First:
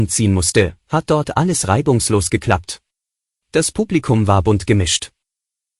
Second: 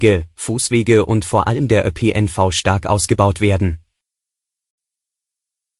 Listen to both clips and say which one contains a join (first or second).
first